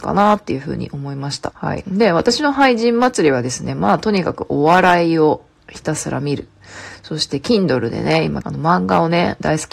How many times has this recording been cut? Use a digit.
2